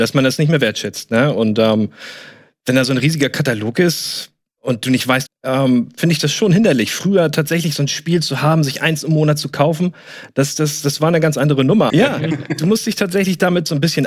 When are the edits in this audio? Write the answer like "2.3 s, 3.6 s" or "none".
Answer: 5.2 s, 11.9 s